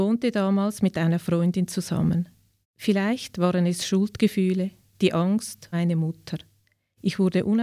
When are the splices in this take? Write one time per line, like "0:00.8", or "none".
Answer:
0:02.6
0:05.7